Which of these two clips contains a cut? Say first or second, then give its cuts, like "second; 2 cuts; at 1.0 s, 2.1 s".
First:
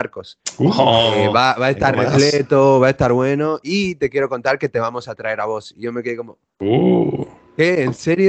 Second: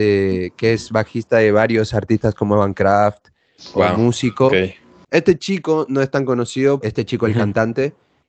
second; 2 cuts; at 5.0 s, 6.8 s